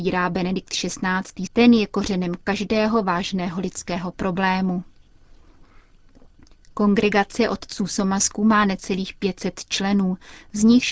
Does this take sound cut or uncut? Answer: cut